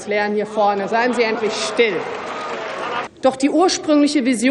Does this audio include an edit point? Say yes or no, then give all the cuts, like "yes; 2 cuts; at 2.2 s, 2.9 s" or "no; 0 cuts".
yes; 1 cut; at 3.1 s